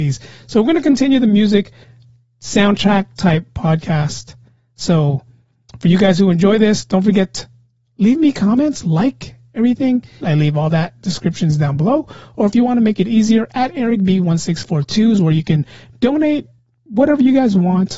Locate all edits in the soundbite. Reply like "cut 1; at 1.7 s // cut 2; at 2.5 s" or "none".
cut 1; at 10.2 s